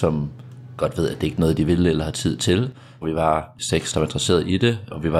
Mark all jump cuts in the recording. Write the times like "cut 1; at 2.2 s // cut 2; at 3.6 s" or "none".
cut 1; at 3.0 s